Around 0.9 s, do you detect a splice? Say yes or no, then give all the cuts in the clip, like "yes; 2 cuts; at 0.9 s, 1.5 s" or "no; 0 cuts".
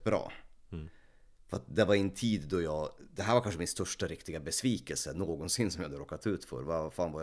no; 0 cuts